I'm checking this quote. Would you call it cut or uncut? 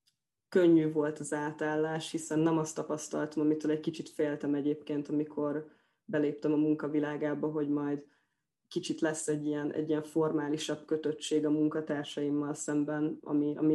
uncut